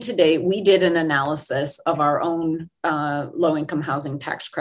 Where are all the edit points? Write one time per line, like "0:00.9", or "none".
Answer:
none